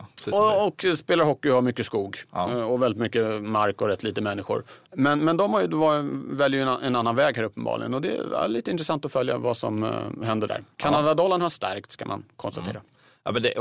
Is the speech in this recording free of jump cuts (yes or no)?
no